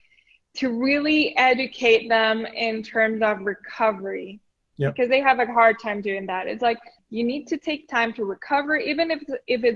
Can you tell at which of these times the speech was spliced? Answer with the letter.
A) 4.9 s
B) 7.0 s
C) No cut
B